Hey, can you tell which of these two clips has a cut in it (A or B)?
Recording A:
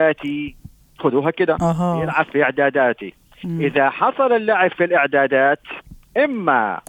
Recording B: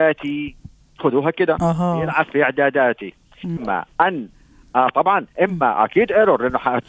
B